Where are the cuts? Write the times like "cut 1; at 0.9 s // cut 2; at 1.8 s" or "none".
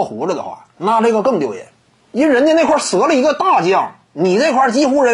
none